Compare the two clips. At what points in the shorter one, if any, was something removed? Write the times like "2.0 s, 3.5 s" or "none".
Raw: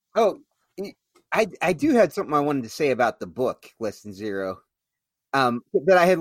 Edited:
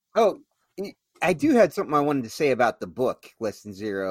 1.2 s